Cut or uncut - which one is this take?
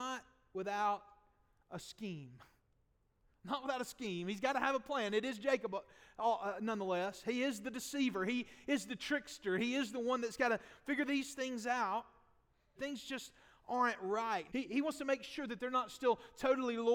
cut